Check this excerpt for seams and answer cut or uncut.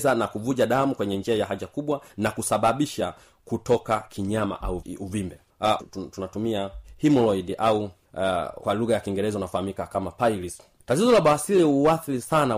cut